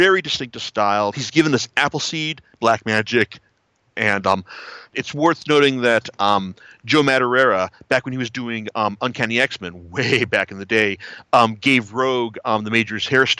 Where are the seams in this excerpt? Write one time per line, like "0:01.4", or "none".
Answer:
0:01.1
0:02.6
0:04.9